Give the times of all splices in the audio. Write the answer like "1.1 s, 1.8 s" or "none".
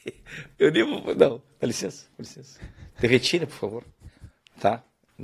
none